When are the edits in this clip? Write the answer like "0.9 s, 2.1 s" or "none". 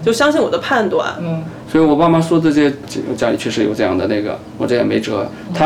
1.6 s, 2.8 s